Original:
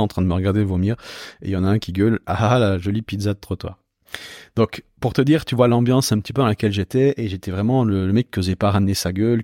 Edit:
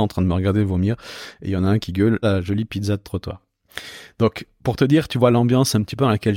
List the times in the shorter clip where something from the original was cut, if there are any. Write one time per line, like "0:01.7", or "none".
0:02.2